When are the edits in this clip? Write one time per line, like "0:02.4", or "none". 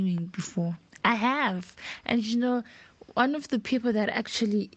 none